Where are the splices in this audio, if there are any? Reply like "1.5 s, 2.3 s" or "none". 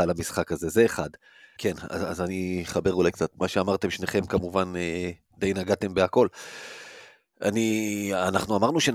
1.6 s

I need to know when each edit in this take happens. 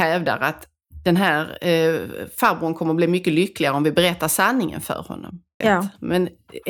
5.6 s

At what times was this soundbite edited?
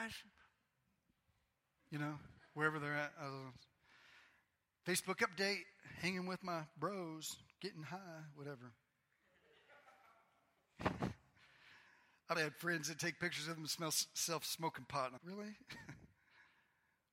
12.4 s, 15.2 s

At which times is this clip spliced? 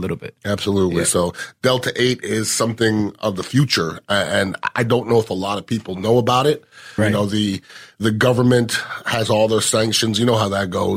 7.0 s

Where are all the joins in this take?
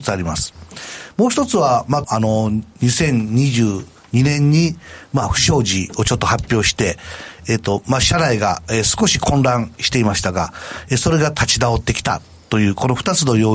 2.0 s

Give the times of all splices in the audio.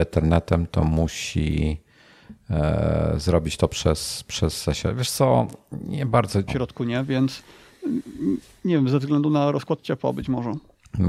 6.5 s

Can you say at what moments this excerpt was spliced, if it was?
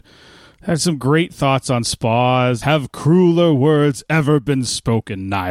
2.6 s

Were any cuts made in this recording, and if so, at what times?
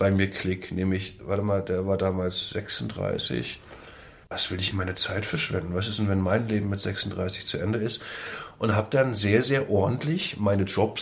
4.7 s

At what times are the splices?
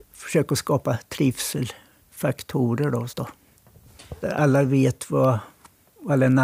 3.1 s, 4.2 s

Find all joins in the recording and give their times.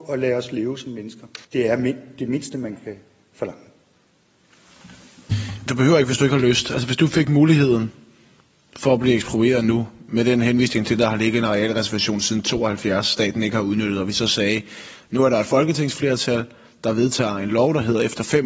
1.4 s, 5.7 s

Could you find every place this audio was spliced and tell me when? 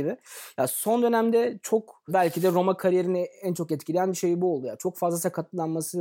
none

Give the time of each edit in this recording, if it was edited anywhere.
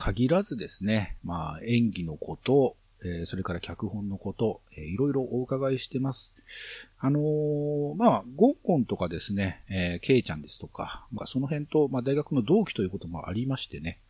11.2 s

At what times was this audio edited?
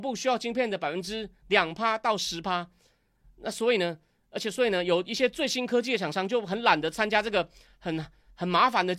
none

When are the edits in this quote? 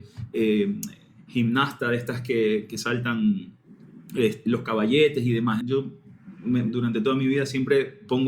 5.6 s, 6.7 s

